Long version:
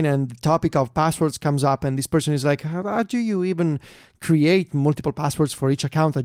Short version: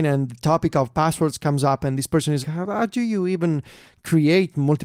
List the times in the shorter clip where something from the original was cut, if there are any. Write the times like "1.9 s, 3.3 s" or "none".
2.4 s